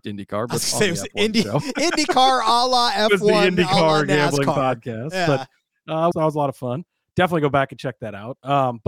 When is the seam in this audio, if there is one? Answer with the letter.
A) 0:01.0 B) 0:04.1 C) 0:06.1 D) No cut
C